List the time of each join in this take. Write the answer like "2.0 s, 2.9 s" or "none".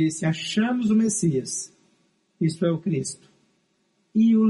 none